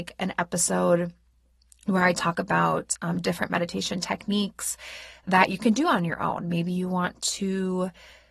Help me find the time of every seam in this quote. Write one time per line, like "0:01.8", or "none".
none